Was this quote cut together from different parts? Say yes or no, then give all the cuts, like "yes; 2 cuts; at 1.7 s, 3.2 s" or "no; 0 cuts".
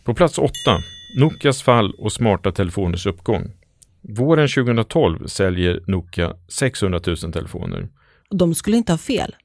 yes; 1 cut; at 8.2 s